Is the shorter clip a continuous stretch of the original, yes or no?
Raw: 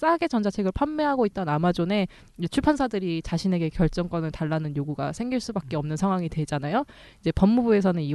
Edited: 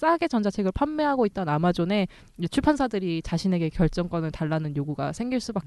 yes